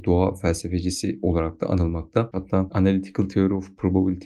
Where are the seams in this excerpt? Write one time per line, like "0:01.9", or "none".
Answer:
0:02.3